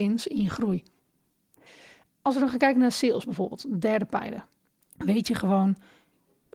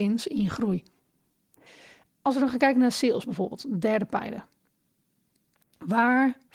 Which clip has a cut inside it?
first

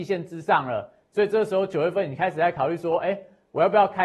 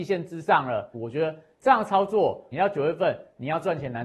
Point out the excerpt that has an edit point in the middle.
second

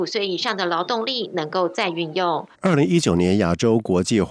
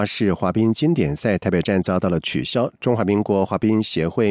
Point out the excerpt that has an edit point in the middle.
first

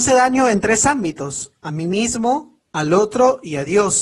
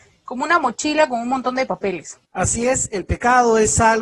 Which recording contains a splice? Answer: second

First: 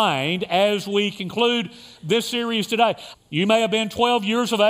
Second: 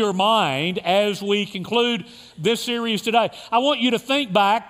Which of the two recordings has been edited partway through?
first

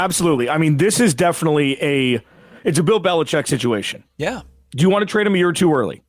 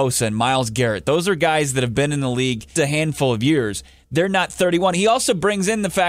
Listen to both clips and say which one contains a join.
second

